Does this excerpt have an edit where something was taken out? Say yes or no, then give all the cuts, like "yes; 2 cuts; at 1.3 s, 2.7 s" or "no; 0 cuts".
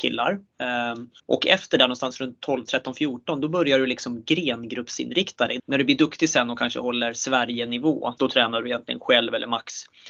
yes; 3 cuts; at 1.2 s, 5.6 s, 8.2 s